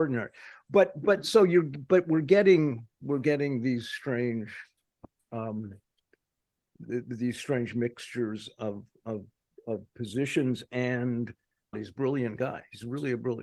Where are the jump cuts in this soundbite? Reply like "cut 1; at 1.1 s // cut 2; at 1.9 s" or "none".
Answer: cut 1; at 11.7 s